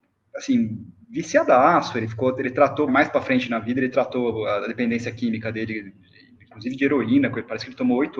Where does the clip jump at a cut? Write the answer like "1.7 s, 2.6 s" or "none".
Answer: 2.9 s